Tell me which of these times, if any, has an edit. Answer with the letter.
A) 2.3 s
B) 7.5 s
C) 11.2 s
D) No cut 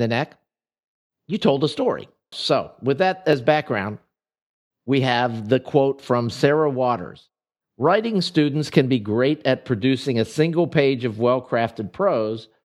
A